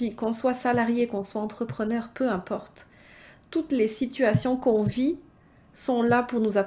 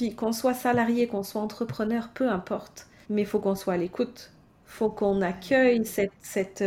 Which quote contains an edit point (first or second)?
second